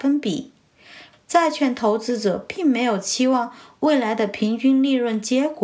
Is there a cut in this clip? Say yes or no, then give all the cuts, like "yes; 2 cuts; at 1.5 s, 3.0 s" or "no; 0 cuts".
yes; 1 cut; at 1.1 s